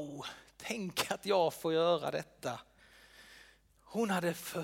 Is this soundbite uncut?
yes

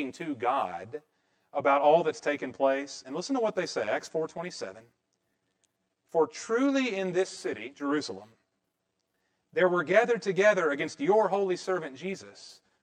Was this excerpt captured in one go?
yes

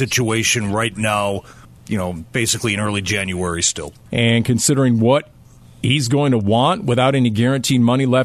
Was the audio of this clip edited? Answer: yes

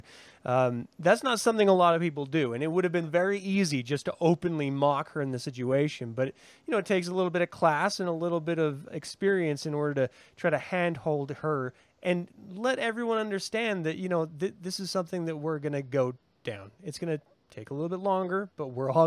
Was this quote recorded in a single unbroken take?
yes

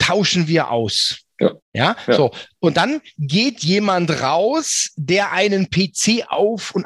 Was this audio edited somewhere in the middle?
yes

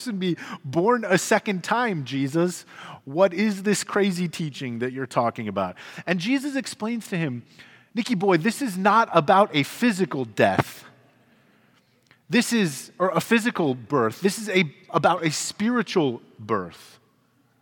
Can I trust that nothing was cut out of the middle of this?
yes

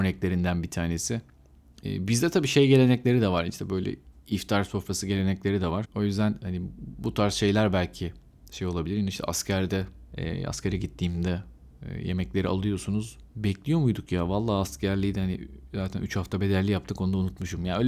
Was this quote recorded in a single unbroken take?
no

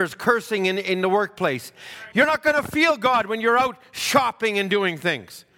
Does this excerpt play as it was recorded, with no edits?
no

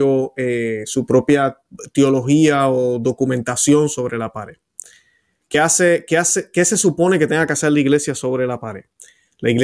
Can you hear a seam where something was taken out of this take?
no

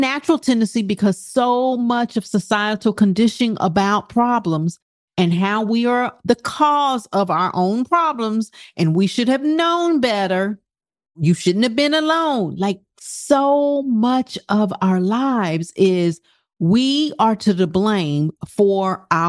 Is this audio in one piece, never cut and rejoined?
no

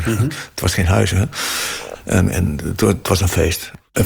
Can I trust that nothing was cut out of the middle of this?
yes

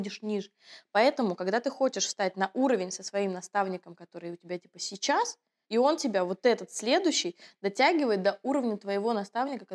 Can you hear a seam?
yes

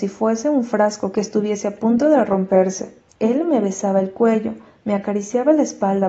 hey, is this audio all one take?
no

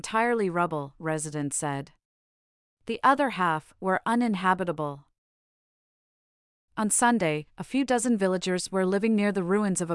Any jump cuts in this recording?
no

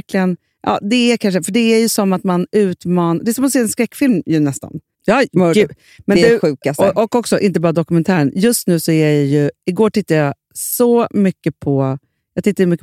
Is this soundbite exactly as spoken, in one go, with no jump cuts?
no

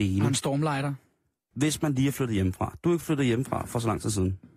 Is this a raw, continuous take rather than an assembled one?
no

